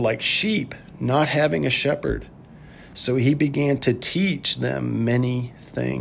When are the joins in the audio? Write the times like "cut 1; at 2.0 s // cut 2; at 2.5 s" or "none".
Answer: none